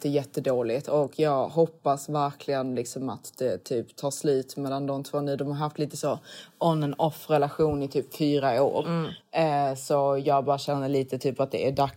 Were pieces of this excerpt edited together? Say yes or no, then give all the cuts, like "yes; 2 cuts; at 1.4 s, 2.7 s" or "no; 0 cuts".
no; 0 cuts